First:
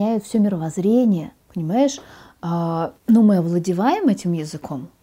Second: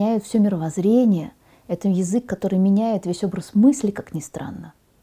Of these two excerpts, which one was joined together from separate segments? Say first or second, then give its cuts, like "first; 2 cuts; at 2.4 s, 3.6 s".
first; 2 cuts; at 1.4 s, 3.0 s